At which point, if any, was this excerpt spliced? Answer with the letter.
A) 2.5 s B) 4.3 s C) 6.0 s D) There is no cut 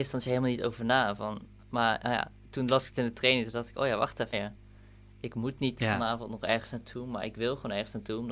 B